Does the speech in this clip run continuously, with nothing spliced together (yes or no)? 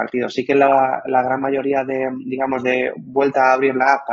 yes